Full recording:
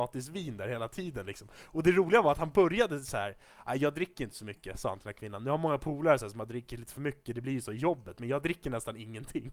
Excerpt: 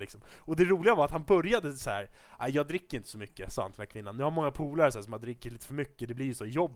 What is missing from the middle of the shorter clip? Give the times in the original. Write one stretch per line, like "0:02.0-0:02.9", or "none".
none